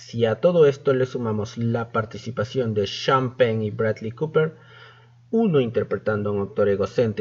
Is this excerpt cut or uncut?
uncut